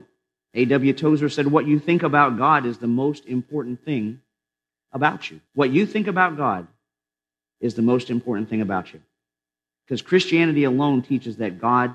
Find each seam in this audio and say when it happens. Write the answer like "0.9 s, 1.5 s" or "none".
5.5 s, 9.7 s